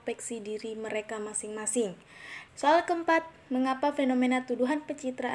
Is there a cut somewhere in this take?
yes; 1 cut; at 2.5 s

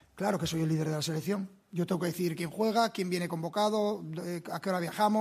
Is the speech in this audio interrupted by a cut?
no; 0 cuts

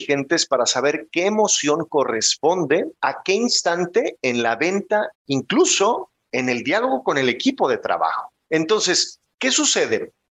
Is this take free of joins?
no; 2 cuts; at 3.0 s, 5.1 s

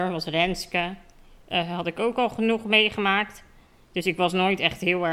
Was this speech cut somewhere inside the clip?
yes; 1 cut; at 1.4 s

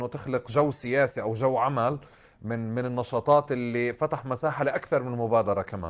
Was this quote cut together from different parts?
no; 0 cuts

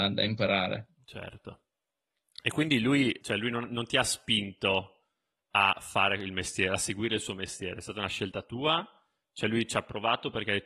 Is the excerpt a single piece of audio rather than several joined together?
yes; 0 cuts

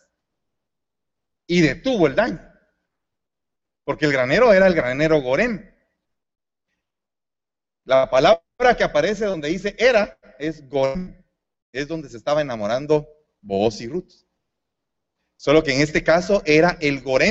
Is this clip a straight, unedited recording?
no; 1 cut; at 1.4 s

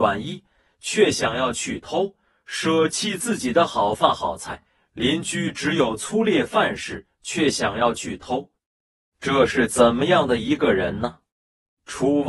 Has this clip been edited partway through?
no; 0 cuts

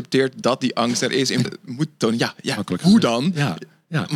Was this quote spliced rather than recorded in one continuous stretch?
yes; 1 cut; at 1.4 s

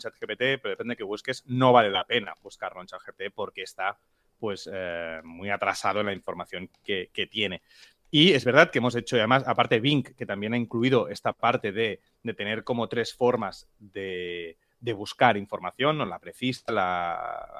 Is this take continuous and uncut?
yes; 0 cuts

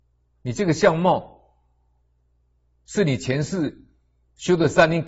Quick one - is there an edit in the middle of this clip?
no; 0 cuts

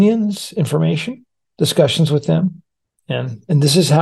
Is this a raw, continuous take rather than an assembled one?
yes; 0 cuts

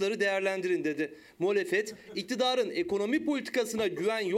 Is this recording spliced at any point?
no; 0 cuts

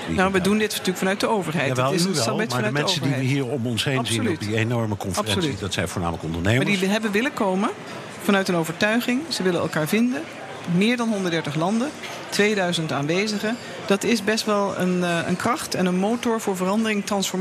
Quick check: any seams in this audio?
no; 0 cuts

